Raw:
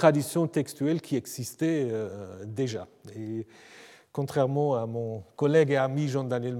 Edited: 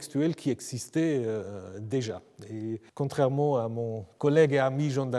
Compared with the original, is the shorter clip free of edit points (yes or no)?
no